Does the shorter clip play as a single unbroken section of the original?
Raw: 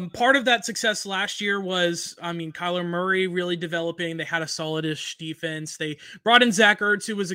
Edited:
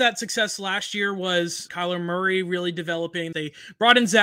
no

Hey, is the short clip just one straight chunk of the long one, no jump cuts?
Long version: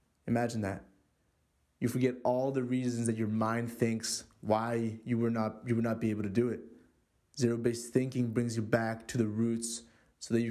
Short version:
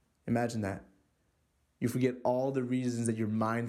yes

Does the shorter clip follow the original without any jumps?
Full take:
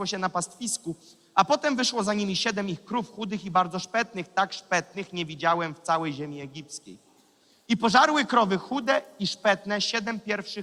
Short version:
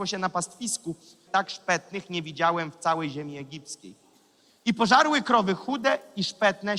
no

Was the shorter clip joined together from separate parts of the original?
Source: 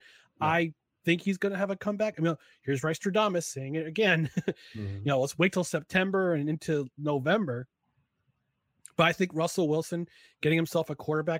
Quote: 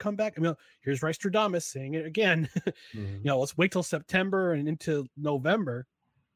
no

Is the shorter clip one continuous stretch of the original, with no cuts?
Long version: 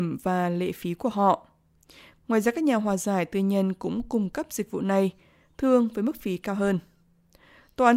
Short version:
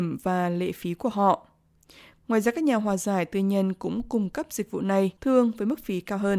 no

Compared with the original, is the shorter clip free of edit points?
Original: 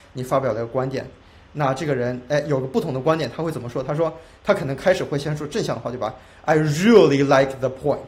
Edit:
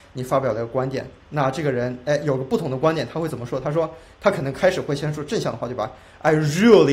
no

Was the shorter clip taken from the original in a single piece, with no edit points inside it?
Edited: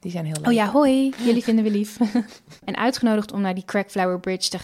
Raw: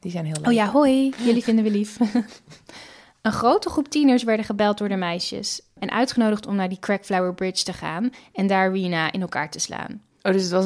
no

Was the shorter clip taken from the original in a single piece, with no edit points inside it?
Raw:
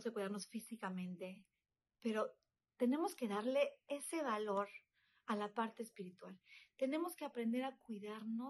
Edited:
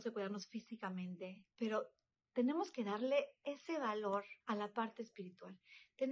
no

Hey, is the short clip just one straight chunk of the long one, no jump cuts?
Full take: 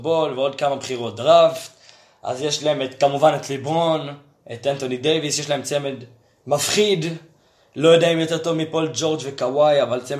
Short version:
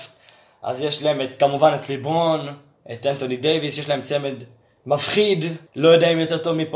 no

